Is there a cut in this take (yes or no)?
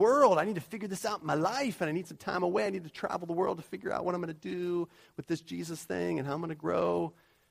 no